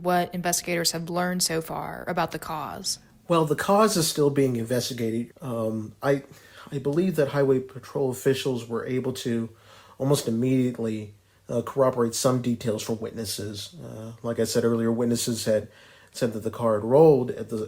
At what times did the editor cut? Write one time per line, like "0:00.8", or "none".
0:05.3